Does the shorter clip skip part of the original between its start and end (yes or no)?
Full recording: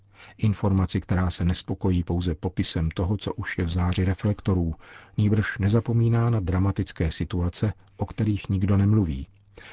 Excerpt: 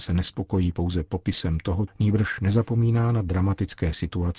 yes